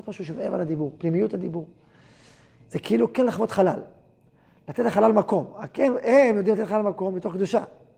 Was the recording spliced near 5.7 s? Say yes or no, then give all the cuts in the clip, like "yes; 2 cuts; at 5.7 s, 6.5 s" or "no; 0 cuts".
no; 0 cuts